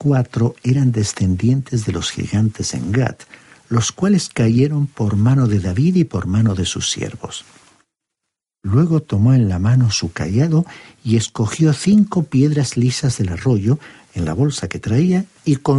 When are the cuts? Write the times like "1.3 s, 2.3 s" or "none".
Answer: 8.4 s, 14.1 s